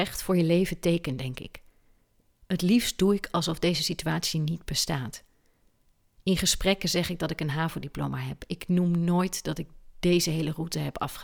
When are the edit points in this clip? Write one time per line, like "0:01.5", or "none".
none